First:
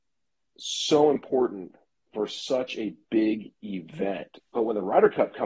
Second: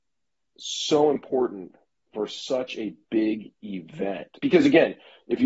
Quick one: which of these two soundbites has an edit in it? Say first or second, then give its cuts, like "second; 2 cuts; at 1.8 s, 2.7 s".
first; 1 cut; at 4.4 s